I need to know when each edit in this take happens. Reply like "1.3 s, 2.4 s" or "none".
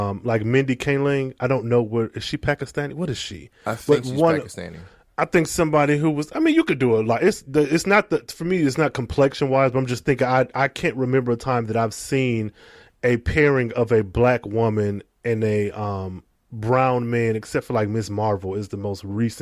none

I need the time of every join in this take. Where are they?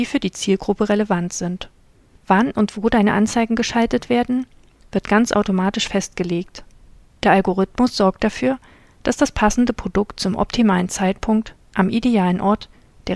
2.2 s

